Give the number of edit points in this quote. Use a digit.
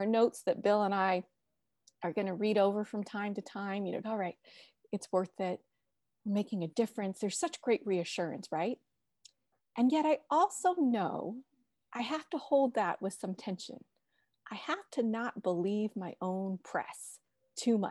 1